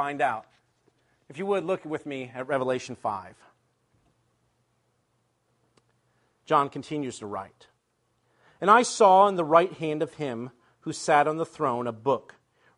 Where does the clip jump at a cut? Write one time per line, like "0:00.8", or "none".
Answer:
none